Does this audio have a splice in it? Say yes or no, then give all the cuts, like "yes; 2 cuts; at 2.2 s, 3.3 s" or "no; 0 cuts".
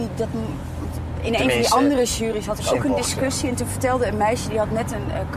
no; 0 cuts